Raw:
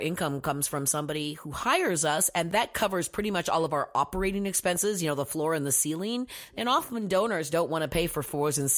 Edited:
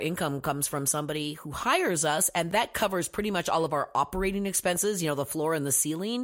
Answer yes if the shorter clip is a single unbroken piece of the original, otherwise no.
yes